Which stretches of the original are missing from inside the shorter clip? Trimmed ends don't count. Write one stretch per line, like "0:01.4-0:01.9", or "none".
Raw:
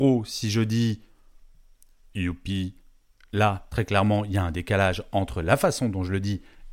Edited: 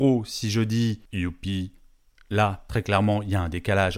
0:01.1-0:02.1